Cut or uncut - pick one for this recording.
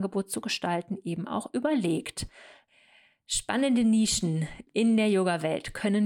uncut